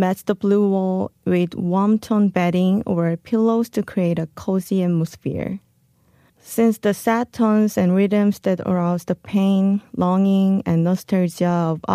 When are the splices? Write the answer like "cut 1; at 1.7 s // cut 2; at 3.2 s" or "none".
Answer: cut 1; at 6.3 s